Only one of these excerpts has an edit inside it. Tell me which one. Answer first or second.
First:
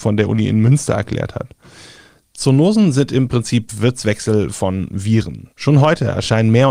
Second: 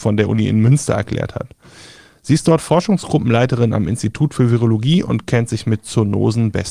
first